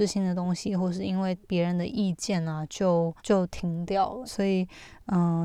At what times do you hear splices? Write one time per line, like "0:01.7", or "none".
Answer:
0:03.2
0:04.3